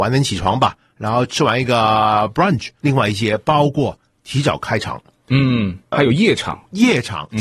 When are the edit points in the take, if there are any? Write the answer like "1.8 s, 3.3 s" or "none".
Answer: 2.8 s, 5.9 s